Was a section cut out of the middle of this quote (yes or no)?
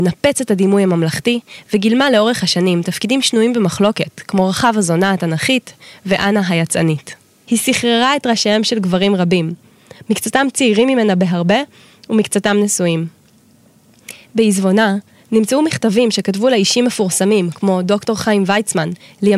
yes